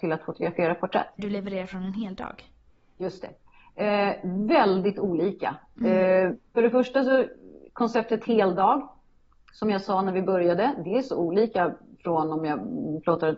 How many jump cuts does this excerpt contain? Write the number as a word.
one